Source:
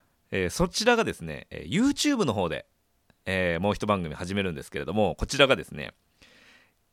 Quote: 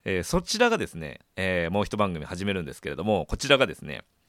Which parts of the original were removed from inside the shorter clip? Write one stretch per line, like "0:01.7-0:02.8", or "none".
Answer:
0:01.5-0:03.1